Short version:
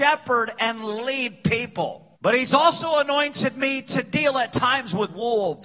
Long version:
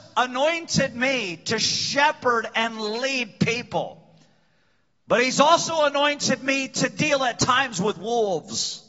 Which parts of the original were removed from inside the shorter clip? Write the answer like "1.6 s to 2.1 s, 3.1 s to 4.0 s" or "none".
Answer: 4.1 s to 5.0 s